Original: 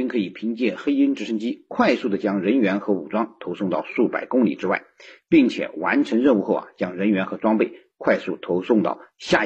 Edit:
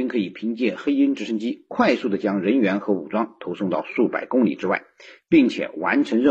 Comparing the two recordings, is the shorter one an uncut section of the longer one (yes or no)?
yes